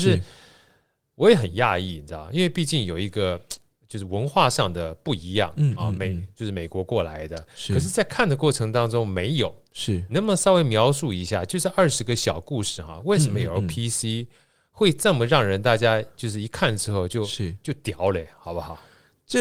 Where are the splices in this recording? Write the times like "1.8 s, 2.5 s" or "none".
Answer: none